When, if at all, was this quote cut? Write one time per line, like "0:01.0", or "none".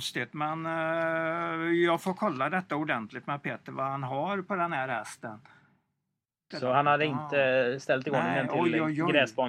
0:06.5